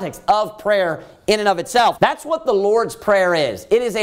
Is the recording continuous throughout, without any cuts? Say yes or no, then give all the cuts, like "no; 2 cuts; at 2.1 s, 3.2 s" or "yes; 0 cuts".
no; 1 cut; at 1.9 s